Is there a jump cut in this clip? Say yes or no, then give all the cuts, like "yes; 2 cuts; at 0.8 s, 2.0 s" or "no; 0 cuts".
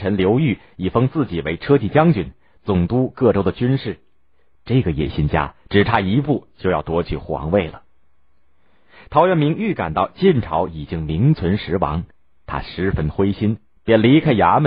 no; 0 cuts